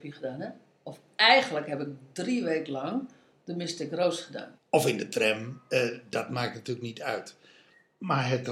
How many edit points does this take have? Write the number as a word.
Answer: one